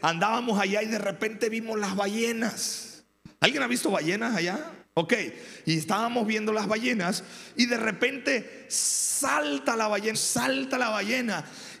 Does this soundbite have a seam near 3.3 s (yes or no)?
no